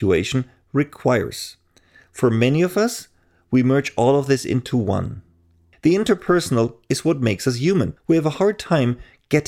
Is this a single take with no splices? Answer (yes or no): no